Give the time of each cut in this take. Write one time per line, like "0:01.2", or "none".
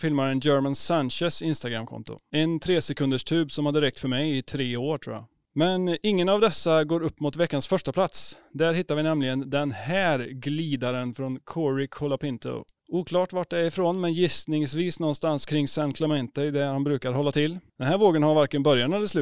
none